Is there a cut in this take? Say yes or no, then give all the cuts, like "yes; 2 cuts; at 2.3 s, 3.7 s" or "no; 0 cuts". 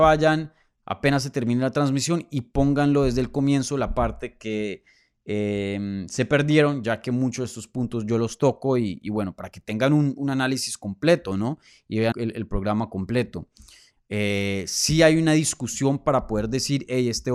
yes; 2 cuts; at 12.1 s, 14.0 s